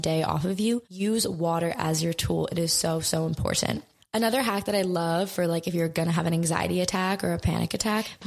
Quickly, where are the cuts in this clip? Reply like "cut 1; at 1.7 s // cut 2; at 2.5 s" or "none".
none